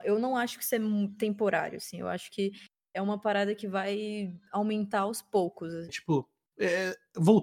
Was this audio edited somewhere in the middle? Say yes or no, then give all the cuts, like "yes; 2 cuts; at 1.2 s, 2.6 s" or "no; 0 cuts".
yes; 1 cut; at 5.9 s